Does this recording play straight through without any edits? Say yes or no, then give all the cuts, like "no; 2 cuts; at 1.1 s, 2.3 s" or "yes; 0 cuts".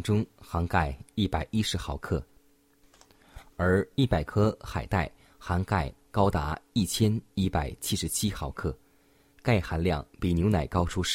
yes; 0 cuts